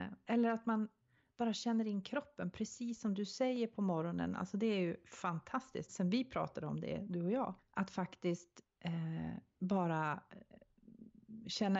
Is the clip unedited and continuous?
no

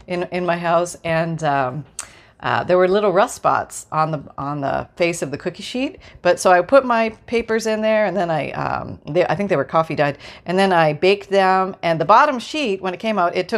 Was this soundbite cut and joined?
no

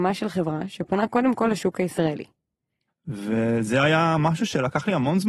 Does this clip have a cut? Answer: yes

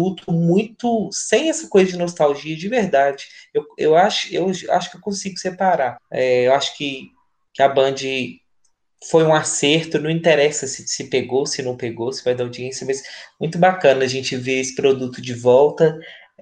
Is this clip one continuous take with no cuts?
no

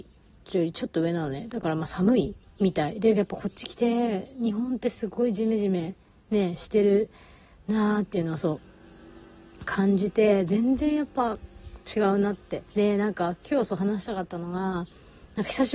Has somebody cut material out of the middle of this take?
yes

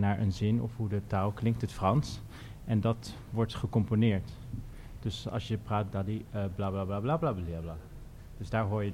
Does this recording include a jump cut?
yes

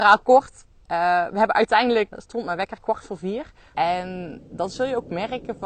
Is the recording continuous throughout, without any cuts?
no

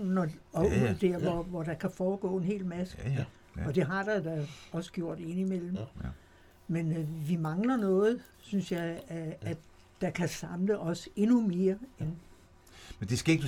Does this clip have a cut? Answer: no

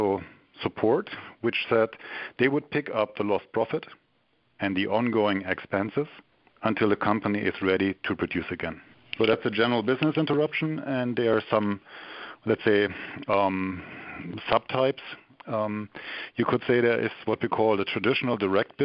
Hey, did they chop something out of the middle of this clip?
no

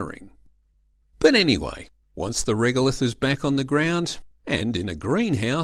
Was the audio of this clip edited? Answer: no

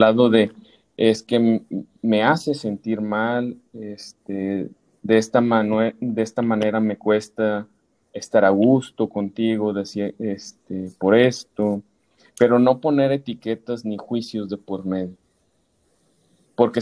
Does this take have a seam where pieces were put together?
no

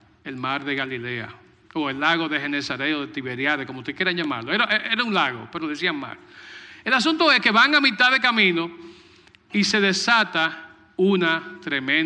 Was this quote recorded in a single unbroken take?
yes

